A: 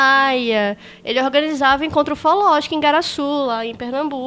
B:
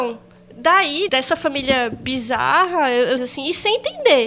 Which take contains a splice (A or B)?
B